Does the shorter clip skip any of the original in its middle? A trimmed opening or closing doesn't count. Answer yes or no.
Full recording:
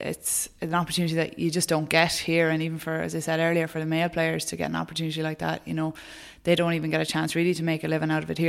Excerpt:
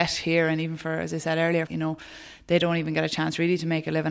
yes